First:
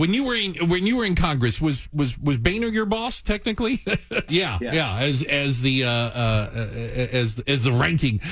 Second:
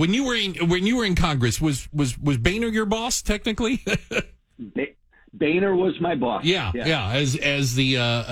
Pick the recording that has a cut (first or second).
first